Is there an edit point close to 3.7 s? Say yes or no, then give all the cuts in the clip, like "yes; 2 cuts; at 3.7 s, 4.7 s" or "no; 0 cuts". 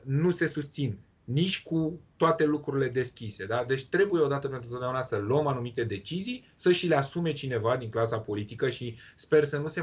no; 0 cuts